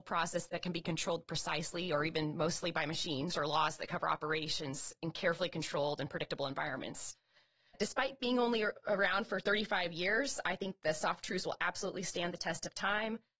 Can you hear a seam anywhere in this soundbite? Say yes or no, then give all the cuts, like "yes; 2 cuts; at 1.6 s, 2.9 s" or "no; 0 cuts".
yes; 1 cut; at 3.3 s